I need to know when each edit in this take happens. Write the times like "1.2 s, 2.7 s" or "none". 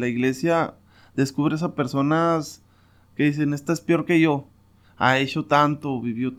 4.8 s